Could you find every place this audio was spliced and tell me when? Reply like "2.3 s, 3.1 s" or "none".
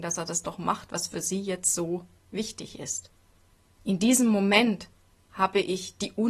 none